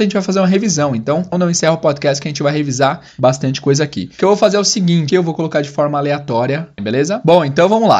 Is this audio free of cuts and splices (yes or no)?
no